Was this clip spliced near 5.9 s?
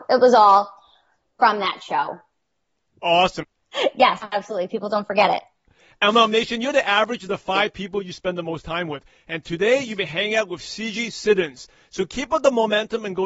no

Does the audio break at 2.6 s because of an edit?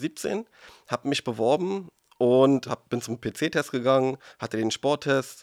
yes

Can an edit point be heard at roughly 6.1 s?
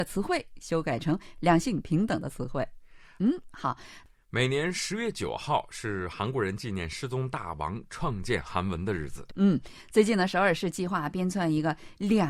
no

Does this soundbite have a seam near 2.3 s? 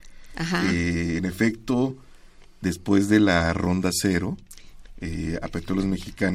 no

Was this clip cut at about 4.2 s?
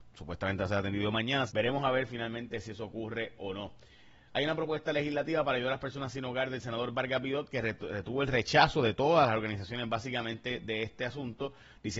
no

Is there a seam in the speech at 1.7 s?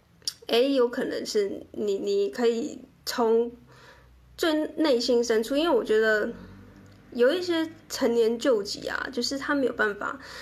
no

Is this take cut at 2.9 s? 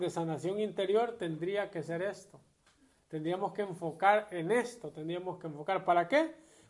no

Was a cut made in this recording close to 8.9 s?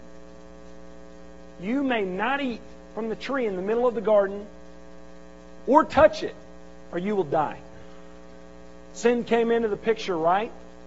yes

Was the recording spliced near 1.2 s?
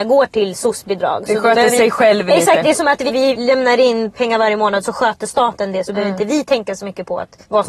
no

